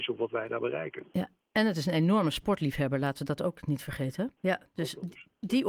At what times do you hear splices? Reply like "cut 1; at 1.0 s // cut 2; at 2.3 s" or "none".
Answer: cut 1; at 4.4 s